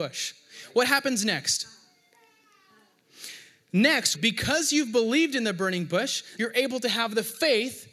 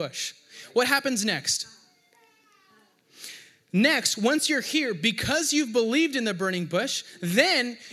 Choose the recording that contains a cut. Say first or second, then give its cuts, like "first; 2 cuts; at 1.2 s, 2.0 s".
first; 2 cuts; at 4.1 s, 6.4 s